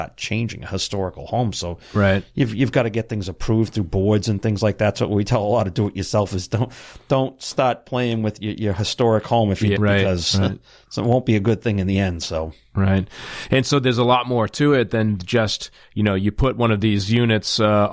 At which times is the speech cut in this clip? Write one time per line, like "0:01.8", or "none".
0:09.8